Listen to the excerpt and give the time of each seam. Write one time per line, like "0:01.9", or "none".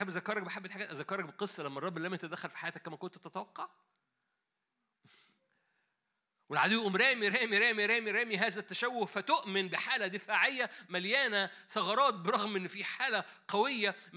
none